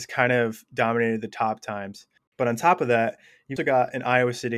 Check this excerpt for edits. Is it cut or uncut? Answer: cut